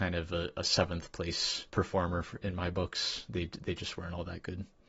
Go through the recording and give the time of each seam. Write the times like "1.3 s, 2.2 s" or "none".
1.7 s